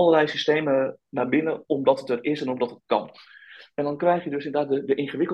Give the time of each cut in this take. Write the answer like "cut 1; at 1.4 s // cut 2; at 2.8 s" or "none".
none